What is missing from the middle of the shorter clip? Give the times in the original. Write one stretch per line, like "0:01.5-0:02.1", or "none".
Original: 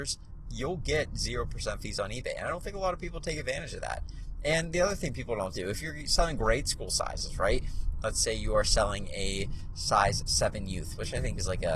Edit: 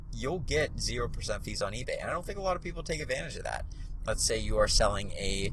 0:04.4-0:08.0